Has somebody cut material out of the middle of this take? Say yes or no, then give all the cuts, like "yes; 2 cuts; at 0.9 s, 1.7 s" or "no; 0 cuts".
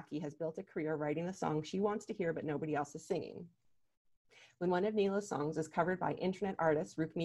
no; 0 cuts